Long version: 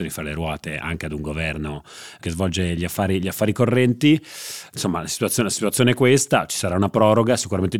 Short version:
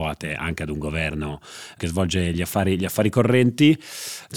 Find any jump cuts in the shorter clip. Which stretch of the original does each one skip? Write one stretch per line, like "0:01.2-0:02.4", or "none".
none